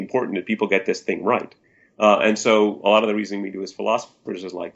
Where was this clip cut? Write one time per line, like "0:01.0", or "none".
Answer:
none